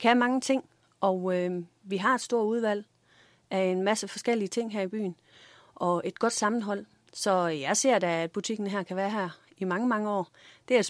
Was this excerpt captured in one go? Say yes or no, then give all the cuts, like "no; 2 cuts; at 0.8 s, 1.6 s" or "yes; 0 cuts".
yes; 0 cuts